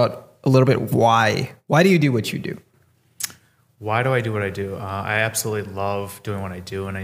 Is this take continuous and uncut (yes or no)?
yes